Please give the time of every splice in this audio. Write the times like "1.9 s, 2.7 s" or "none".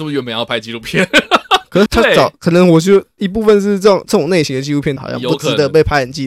1.9 s, 5.0 s